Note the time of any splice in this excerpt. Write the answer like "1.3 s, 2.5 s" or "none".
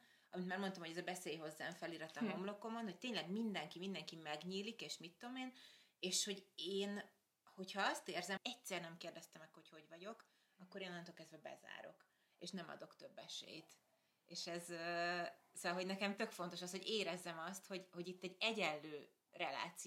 8.4 s